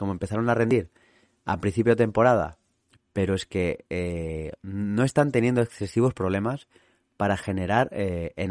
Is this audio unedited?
no; 1 cut; at 3.0 s

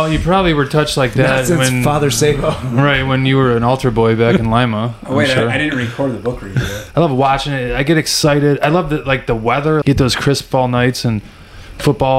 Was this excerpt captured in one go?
no; 2 cuts; at 6.9 s, 9.8 s

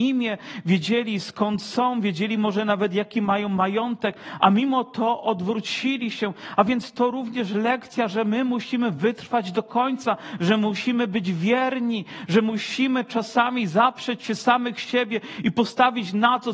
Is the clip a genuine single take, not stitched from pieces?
yes; 0 cuts

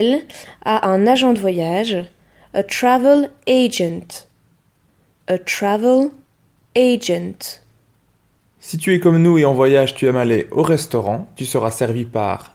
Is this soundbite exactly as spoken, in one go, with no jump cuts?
yes; 0 cuts

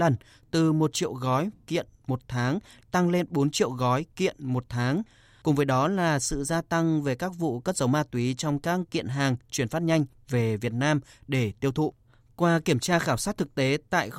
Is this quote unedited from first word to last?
yes; 0 cuts

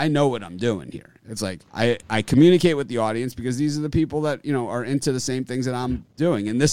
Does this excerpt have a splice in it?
yes; 1 cut; at 1.7 s

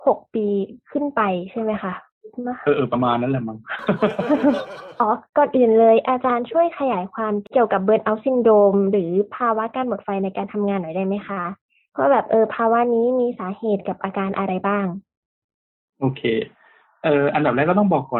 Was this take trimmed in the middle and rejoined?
no; 0 cuts

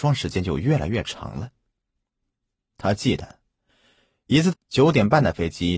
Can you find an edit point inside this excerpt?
yes; 1 cut; at 4.5 s

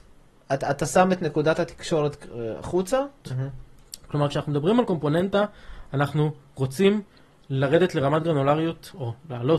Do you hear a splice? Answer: yes; 1 cut; at 3.2 s

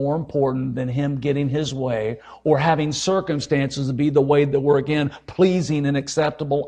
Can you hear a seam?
no; 0 cuts

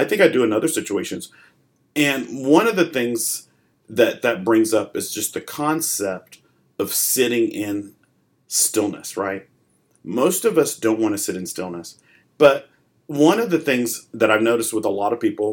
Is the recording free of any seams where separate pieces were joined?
no; 1 cut; at 12.2 s

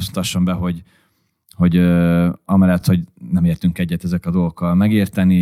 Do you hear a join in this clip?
no; 0 cuts

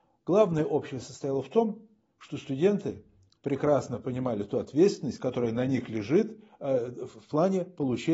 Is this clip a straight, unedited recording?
no; 1 cut; at 3.4 s

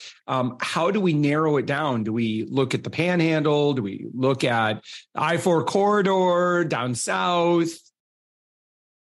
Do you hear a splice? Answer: no; 0 cuts

